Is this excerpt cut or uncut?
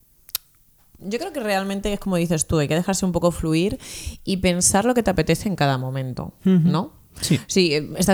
cut